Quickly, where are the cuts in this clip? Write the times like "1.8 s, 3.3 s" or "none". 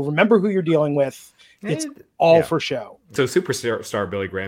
3.2 s

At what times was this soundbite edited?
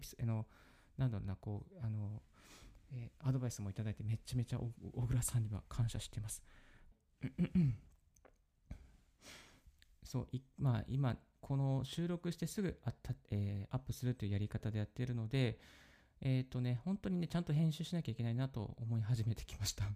6.9 s

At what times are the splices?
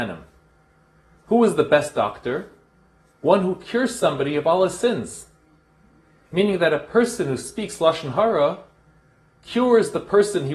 none

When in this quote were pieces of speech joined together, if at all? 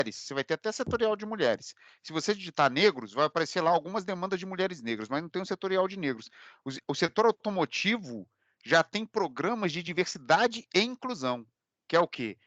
none

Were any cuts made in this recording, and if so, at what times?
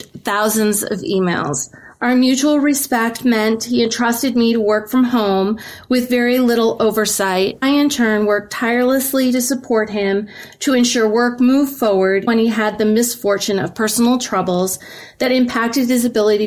7.6 s, 12.3 s

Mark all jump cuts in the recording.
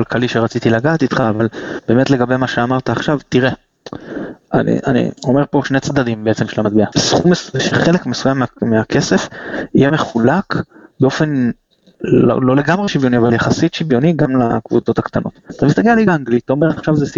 6.9 s, 15.5 s

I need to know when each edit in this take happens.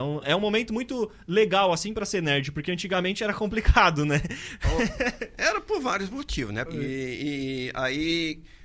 6.7 s

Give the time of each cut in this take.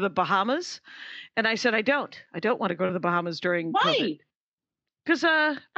none

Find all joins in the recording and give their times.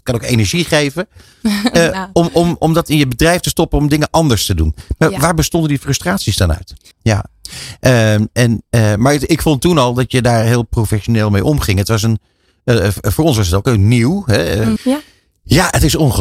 6.9 s, 14.8 s

